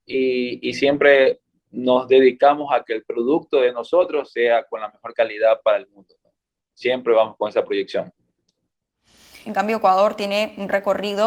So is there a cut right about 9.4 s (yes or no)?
yes